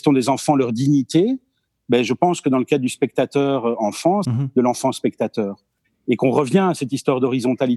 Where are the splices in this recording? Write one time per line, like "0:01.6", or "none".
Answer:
0:04.3